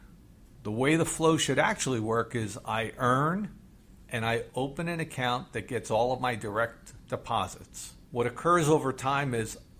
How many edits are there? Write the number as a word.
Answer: one